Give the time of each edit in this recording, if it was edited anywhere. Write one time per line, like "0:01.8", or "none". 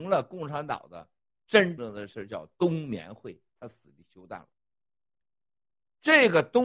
0:01.8